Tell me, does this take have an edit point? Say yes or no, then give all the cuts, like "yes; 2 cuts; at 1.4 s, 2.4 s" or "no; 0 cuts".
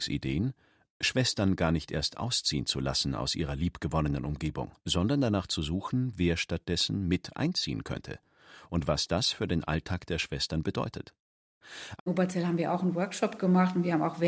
yes; 2 cuts; at 4.8 s, 12.0 s